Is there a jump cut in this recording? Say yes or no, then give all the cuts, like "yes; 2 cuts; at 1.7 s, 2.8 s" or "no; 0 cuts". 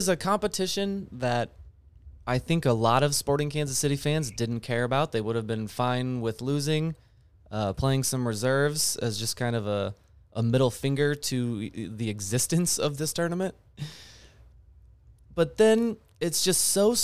no; 0 cuts